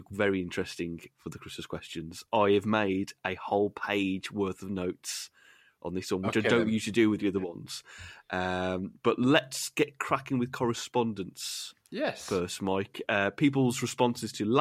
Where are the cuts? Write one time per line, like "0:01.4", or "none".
none